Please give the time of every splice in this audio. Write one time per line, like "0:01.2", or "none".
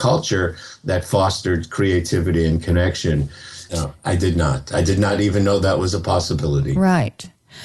0:03.7